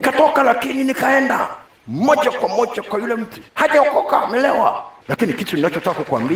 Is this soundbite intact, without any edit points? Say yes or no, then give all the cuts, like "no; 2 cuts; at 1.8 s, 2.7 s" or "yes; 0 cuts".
no; 2 cuts; at 3.5 s, 5.1 s